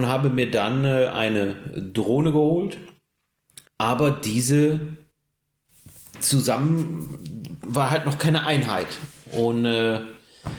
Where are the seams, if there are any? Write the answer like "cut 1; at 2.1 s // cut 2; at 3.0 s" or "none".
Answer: cut 1; at 3.7 s